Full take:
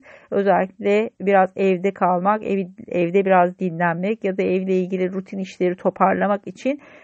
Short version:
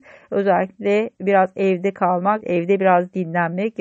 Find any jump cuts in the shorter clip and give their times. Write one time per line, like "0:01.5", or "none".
0:02.4